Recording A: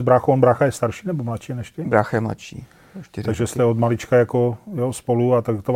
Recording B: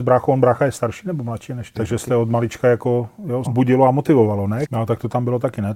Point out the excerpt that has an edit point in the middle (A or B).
B